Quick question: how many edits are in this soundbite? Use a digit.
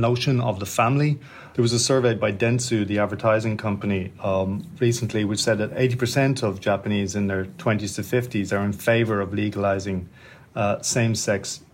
1